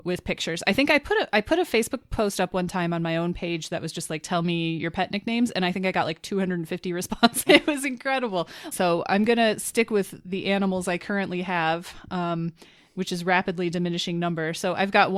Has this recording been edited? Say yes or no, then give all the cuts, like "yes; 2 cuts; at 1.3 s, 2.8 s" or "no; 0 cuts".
yes; 2 cuts; at 7.5 s, 8.7 s